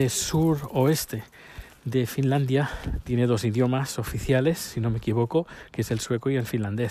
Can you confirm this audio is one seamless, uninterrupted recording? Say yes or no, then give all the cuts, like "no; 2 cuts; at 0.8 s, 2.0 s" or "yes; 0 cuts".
no; 1 cut; at 3.0 s